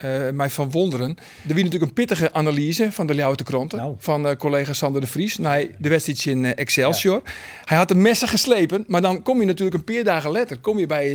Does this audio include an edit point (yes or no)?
no